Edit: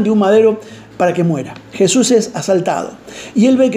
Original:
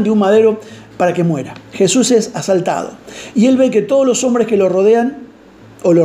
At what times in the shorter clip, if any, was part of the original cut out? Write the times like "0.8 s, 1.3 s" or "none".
none